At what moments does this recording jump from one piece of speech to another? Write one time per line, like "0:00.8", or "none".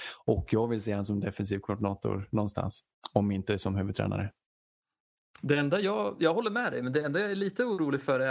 none